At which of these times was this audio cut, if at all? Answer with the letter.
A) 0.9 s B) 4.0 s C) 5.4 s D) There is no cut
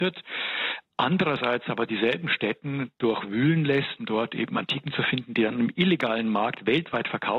B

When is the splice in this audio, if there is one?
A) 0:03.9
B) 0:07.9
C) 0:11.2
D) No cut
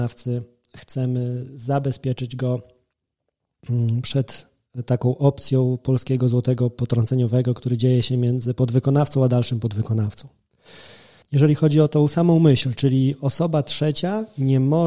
C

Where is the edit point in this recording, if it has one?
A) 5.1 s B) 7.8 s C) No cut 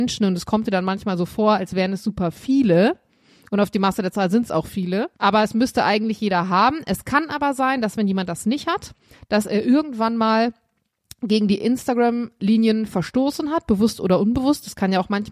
A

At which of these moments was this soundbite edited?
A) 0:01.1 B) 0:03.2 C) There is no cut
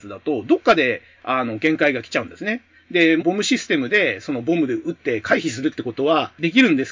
B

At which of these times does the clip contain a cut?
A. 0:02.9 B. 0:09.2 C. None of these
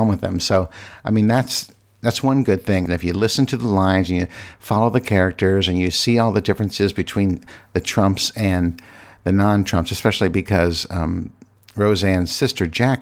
A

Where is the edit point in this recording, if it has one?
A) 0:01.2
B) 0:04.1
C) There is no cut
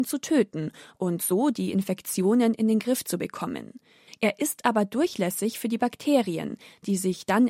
B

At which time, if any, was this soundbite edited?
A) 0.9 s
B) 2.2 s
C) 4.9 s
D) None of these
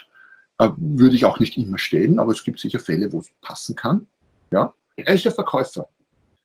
C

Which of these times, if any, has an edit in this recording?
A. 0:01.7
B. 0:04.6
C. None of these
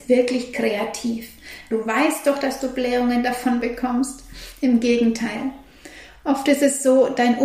A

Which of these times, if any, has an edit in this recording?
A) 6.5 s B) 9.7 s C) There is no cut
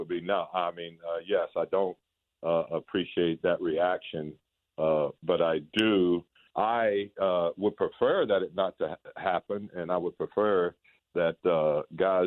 A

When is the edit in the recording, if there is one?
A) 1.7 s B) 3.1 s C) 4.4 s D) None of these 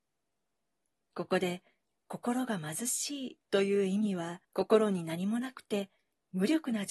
C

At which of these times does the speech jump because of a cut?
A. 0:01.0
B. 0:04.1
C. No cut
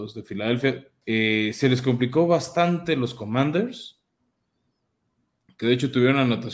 A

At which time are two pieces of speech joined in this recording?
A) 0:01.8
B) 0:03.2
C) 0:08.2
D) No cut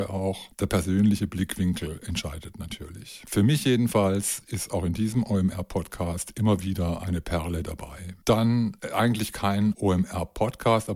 D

